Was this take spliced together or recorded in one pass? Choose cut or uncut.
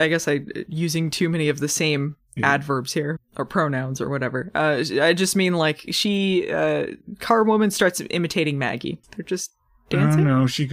cut